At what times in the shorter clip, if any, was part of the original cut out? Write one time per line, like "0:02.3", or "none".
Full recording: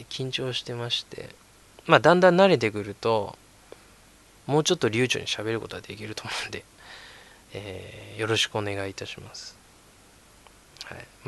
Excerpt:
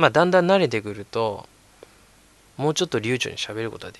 none